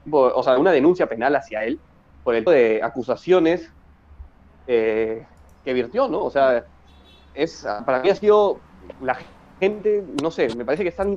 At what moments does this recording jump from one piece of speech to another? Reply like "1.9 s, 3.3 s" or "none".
2.5 s